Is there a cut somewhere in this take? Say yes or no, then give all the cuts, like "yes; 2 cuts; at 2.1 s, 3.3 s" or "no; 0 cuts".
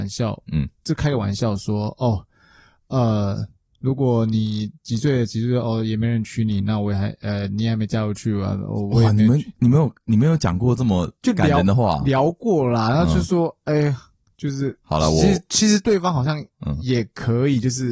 no; 0 cuts